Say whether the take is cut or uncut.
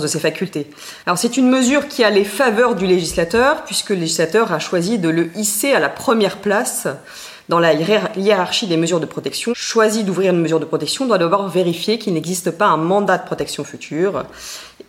cut